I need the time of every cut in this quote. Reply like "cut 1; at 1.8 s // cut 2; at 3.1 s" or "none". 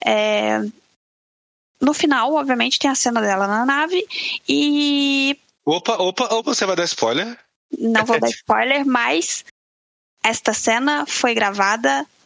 none